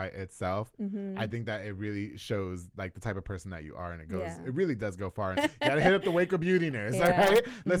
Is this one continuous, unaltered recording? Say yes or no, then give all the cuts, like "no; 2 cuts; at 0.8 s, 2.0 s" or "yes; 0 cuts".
no; 1 cut; at 5.3 s